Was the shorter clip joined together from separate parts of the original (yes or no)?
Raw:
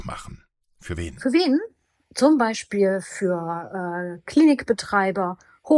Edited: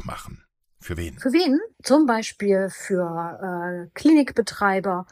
yes